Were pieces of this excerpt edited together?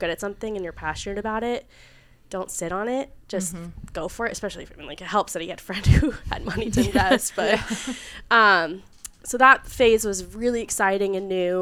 no; 0 cuts

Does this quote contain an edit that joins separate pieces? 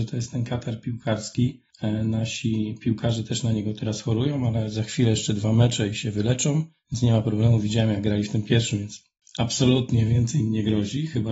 no; 0 cuts

